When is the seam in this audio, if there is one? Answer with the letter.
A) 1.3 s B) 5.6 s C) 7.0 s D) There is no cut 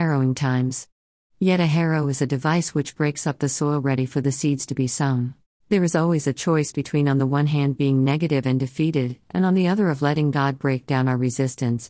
B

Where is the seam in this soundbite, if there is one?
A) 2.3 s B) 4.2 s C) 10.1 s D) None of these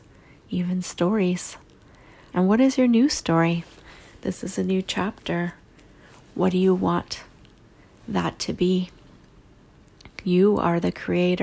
A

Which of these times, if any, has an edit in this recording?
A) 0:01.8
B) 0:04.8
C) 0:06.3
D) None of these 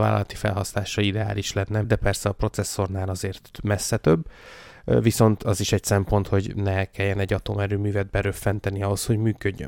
A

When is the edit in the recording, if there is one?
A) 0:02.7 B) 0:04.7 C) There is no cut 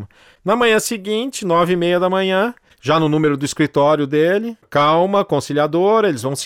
A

